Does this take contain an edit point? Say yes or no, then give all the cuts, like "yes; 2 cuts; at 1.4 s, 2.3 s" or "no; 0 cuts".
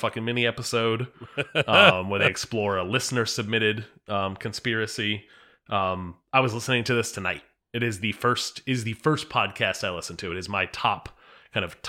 no; 0 cuts